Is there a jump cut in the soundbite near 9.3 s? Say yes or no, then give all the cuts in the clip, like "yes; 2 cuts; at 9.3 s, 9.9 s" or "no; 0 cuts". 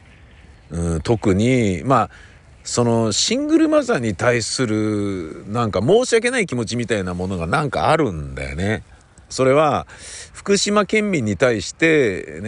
yes; 1 cut; at 9.3 s